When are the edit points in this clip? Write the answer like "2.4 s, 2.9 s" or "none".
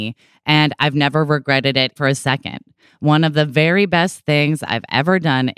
2.0 s